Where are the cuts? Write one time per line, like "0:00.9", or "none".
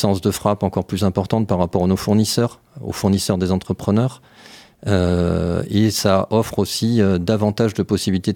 none